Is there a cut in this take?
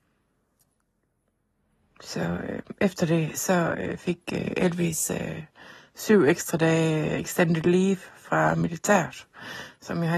no; 0 cuts

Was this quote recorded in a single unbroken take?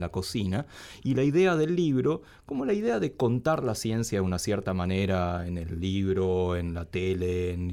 yes; 0 cuts

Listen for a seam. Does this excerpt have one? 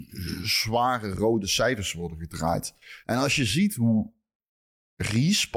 yes; 1 cut; at 3.0 s

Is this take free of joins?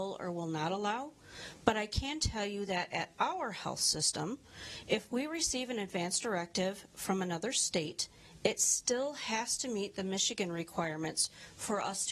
yes; 0 cuts

